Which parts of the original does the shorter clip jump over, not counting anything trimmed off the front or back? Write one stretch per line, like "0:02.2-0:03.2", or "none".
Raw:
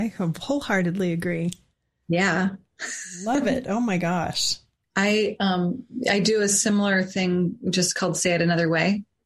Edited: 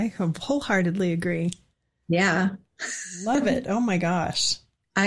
none